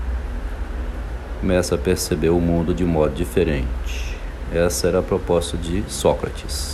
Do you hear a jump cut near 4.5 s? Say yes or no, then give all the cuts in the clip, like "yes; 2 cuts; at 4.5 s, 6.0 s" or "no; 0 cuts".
no; 0 cuts